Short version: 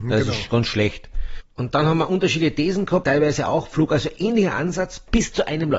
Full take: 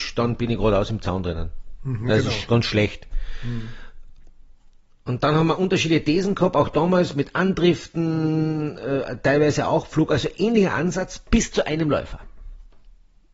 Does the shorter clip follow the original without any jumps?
no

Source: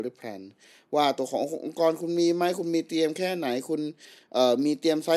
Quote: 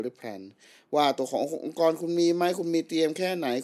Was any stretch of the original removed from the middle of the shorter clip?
no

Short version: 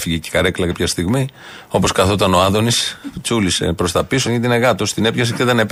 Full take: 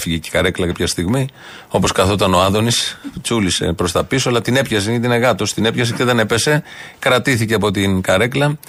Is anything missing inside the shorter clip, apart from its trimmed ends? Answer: yes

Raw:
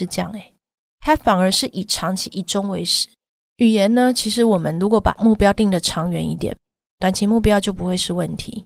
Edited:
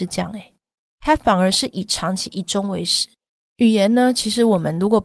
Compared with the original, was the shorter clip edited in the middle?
no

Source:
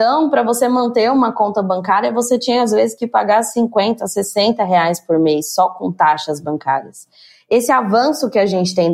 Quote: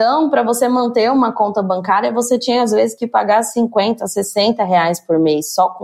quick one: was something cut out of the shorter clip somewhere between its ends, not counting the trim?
no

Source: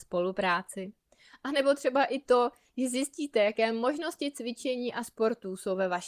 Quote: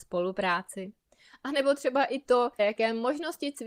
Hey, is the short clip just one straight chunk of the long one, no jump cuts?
no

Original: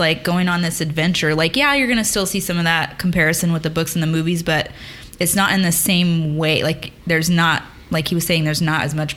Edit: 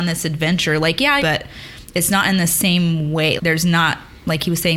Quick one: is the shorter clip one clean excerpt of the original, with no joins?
no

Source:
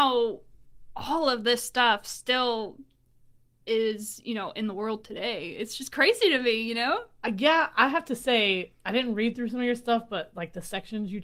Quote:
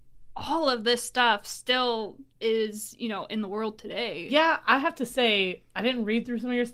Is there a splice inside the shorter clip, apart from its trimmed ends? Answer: yes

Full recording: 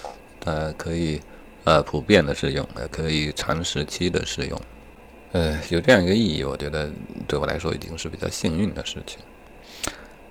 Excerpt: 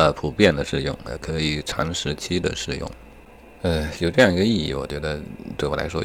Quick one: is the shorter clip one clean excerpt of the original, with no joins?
yes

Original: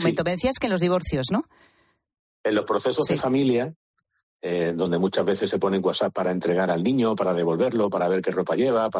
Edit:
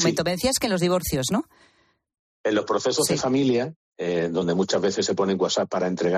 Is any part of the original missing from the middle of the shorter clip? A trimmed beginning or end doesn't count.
yes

